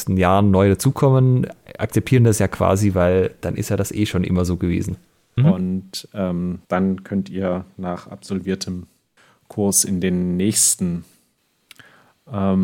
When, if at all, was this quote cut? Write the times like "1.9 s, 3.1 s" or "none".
5.4 s, 6.6 s